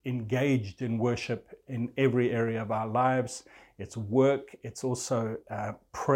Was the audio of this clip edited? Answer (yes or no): no